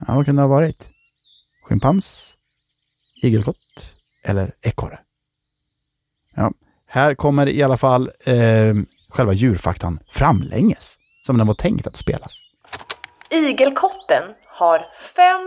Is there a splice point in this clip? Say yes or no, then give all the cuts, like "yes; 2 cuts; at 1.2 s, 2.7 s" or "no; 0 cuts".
no; 0 cuts